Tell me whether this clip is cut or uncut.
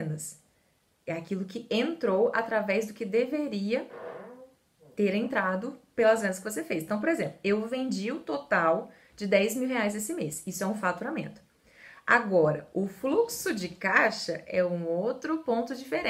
uncut